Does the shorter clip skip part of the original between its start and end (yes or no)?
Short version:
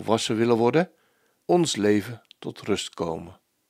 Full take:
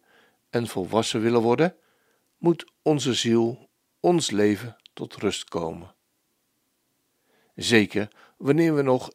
yes